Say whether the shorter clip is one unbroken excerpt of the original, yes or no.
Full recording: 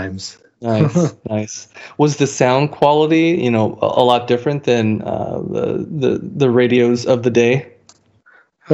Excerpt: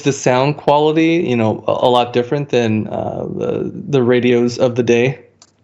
no